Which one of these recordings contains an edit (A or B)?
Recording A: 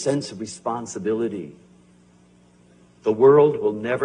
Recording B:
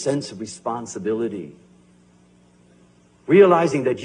A